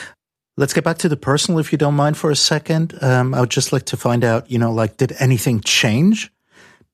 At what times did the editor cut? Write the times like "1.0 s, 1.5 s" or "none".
none